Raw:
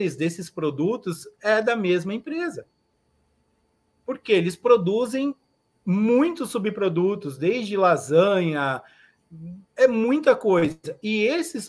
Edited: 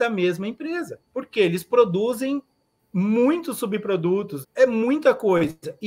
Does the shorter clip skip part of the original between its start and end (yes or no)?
yes